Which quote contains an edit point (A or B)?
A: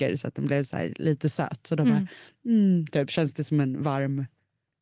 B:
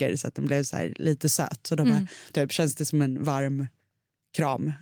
B